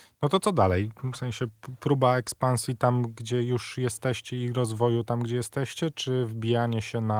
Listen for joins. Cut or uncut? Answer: uncut